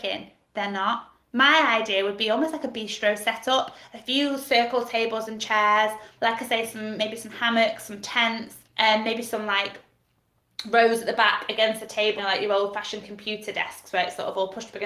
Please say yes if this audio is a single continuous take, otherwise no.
no